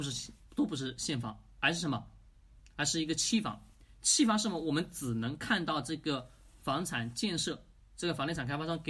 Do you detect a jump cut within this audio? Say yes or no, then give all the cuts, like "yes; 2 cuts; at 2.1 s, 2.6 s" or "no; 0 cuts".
no; 0 cuts